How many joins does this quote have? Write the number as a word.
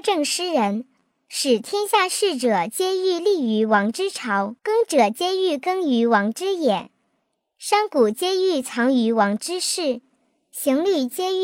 one